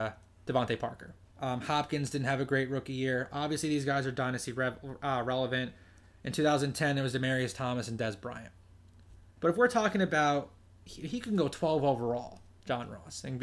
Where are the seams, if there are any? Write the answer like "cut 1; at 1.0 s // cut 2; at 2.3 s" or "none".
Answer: cut 1; at 1.3 s // cut 2; at 9.4 s